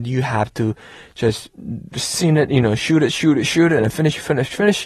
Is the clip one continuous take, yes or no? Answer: yes